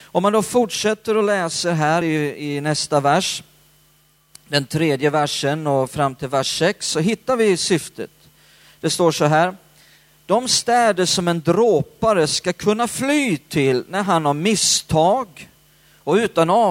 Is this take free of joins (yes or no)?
yes